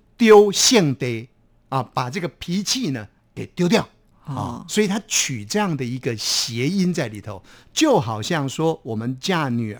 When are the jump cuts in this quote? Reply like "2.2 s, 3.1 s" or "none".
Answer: none